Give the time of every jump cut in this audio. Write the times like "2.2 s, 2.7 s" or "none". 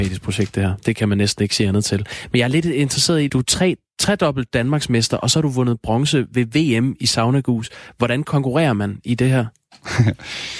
3.3 s